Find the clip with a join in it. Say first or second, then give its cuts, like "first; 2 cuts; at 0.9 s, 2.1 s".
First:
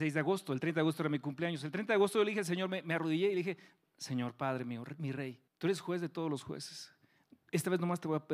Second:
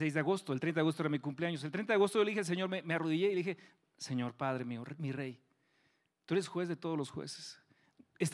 first; 1 cut; at 5.5 s